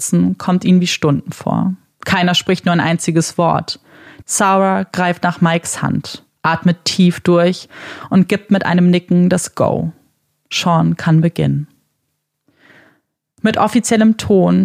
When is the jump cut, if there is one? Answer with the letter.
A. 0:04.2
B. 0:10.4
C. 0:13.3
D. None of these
A